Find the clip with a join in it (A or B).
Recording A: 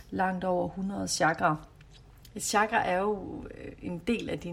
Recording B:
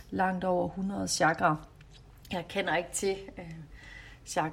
A